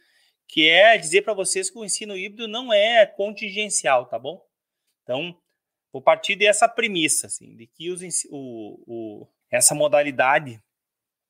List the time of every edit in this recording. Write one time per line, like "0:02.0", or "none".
0:04.9
0:09.4